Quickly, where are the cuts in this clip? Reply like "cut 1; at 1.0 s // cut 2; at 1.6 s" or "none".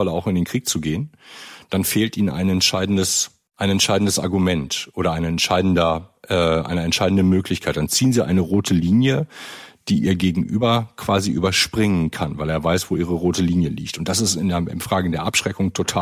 none